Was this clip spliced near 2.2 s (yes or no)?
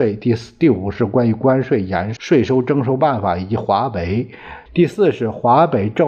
yes